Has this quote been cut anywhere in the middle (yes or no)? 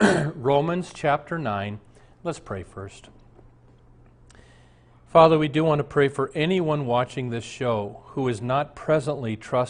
no